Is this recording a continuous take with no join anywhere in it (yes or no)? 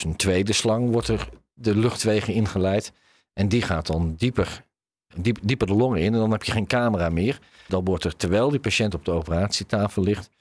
no